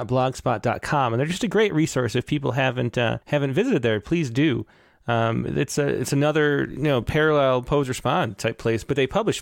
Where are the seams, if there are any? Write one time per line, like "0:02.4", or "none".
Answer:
0:03.2